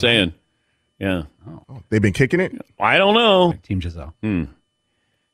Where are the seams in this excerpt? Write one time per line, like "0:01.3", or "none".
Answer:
0:01.6
0:03.5